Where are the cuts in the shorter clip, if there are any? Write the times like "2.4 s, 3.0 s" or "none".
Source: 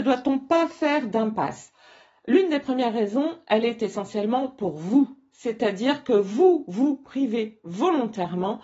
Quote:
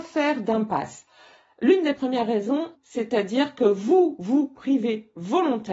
2.8 s